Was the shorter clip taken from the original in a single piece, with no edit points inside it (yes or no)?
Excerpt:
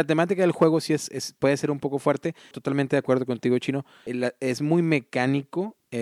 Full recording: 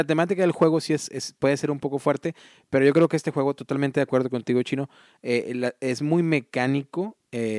no